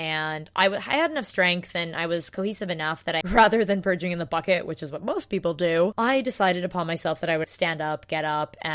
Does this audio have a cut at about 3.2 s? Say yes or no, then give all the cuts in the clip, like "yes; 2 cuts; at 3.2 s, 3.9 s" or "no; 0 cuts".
yes; 2 cuts; at 3.2 s, 7.4 s